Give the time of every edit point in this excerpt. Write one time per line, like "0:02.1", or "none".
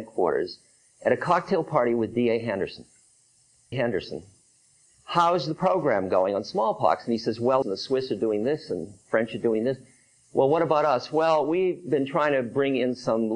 0:03.7
0:07.6